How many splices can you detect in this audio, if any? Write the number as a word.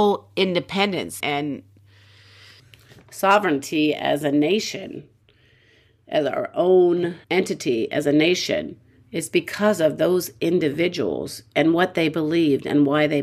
two